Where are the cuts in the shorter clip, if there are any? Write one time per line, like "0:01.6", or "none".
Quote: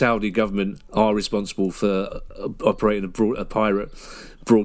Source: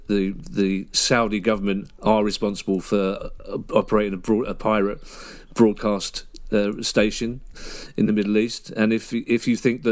none